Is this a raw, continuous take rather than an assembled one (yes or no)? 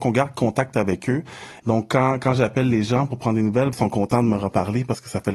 no